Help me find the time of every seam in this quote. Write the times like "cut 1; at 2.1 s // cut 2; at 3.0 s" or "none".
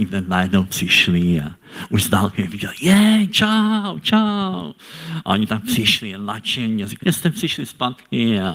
cut 1; at 7.0 s